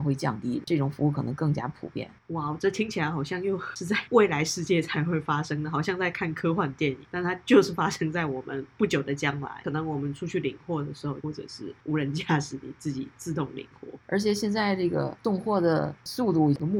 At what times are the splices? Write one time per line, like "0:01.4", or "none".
0:11.2

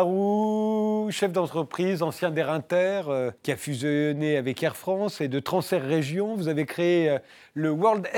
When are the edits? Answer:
0:03.4

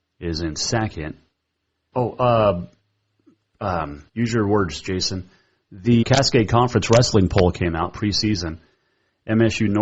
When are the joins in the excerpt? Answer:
0:01.9
0:04.1
0:06.0

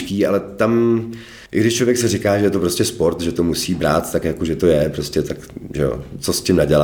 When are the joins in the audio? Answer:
0:01.5

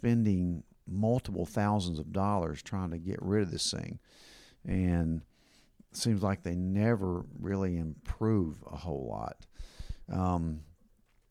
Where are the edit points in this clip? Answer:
none

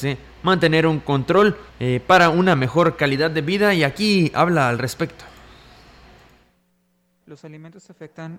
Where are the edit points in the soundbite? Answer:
0:01.7

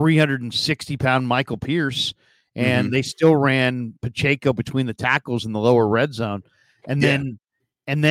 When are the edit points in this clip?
none

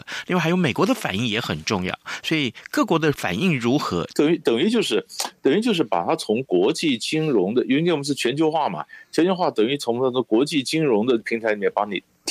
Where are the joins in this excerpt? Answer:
0:04.1

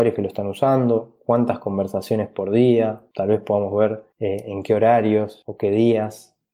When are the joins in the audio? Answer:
none

